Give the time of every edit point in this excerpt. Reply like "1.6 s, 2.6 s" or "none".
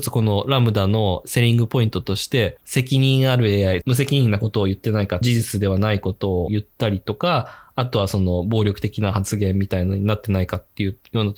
2.6 s